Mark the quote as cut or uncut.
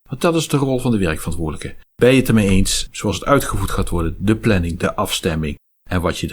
cut